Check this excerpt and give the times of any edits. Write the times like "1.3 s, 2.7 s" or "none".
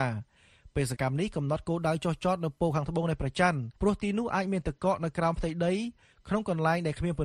1.0 s, 3.8 s